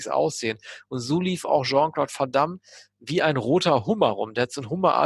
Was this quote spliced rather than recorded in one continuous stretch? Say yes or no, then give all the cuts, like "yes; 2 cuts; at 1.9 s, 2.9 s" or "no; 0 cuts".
no; 0 cuts